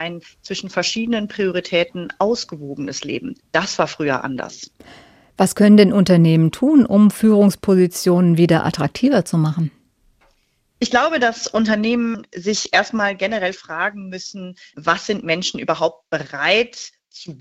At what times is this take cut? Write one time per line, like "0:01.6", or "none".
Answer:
none